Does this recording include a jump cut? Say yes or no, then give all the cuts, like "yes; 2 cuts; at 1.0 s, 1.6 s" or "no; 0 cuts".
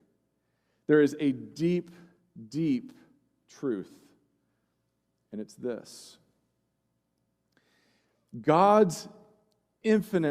no; 0 cuts